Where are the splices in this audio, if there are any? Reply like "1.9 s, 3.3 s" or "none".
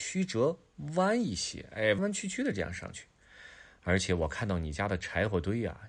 2.0 s